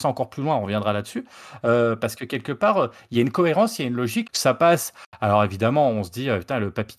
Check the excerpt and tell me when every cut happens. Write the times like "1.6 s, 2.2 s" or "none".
4.2 s